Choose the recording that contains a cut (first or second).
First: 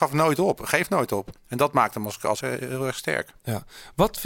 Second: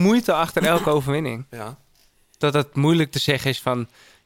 first